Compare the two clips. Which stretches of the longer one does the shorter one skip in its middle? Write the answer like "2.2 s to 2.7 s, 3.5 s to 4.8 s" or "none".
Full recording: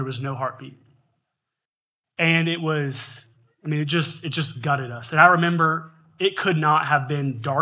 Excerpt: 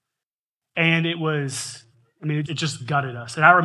3.9 s to 4.2 s